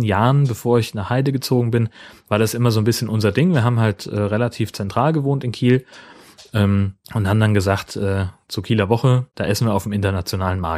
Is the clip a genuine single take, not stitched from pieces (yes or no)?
no